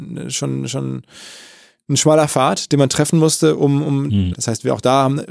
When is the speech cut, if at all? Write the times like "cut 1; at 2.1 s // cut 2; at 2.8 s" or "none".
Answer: cut 1; at 4.3 s